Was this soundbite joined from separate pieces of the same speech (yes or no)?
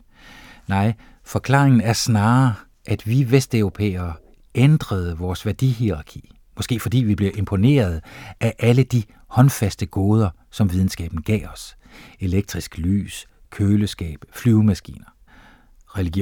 no